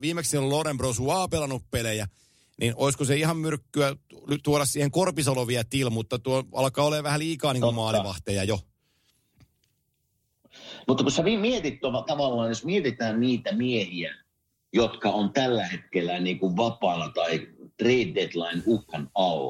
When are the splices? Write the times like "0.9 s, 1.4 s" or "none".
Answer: none